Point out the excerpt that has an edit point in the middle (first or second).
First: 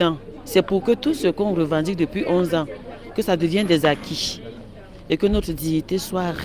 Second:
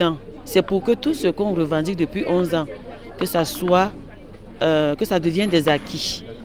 first